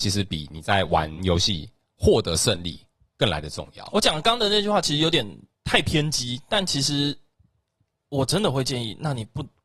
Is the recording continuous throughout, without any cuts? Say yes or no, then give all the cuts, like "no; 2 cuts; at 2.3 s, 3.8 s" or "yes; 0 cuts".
yes; 0 cuts